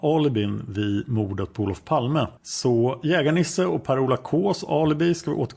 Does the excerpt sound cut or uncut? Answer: cut